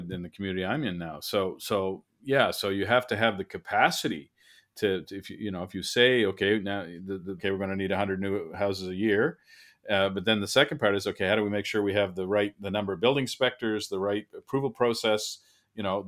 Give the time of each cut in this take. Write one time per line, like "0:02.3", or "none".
0:07.4